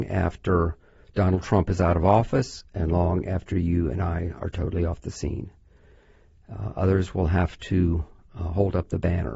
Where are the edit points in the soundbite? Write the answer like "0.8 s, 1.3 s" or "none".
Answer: none

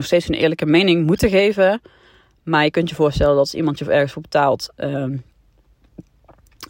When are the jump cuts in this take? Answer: 4.7 s

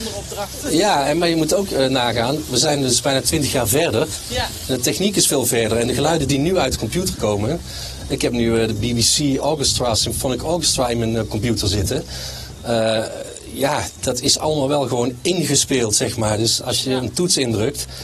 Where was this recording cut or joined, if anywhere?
none

